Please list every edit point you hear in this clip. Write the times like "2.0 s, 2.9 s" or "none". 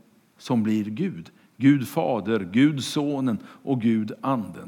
none